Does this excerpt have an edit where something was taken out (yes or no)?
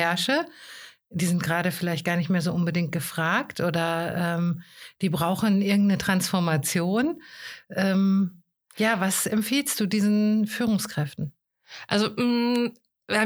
no